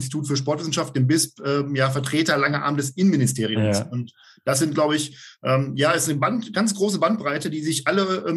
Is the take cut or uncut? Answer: uncut